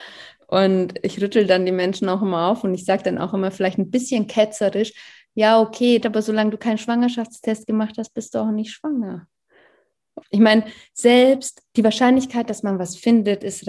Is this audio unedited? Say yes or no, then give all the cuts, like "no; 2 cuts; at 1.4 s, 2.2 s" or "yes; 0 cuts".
no; 2 cuts; at 6.0 s, 10.2 s